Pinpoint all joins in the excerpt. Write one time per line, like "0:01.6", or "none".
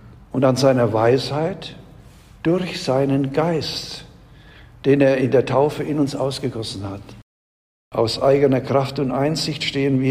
0:07.8